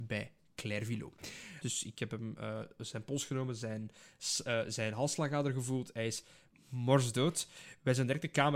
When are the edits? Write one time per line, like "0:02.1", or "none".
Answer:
0:01.6